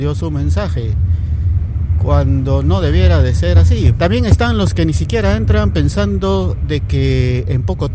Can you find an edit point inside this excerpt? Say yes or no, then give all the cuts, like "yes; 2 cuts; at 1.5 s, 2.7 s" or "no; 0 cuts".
yes; 1 cut; at 3.9 s